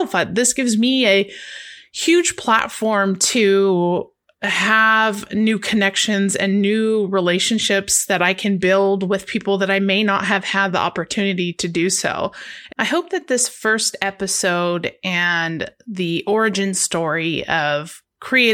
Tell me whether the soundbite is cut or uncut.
cut